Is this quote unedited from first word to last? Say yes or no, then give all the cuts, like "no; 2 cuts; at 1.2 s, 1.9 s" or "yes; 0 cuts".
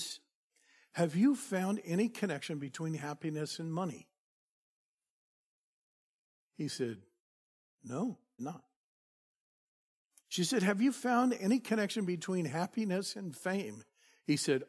no; 1 cut; at 8.4 s